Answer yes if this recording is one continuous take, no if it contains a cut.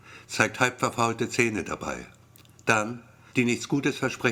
no